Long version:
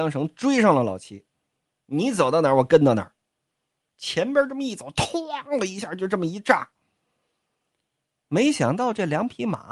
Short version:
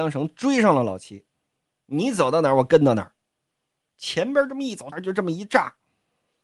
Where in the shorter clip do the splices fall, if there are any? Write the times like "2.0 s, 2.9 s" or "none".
4.9 s